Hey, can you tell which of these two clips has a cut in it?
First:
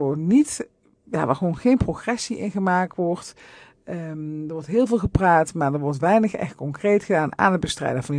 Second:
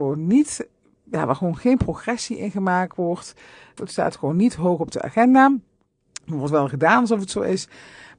second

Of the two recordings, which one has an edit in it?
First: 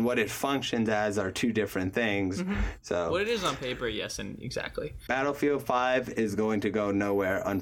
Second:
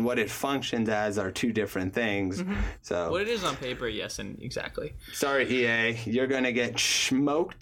first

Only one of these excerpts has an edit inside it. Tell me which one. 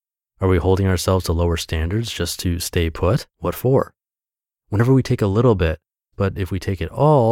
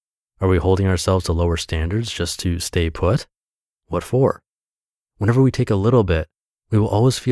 first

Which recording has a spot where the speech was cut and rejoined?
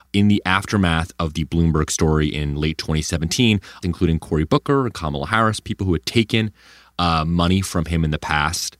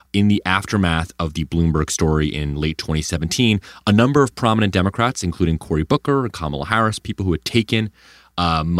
first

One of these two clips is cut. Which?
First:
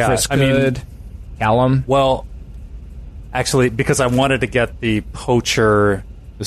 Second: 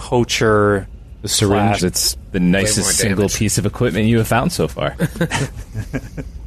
second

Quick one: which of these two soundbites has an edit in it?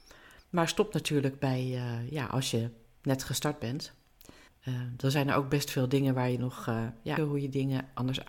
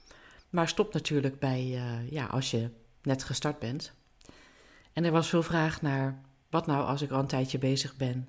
first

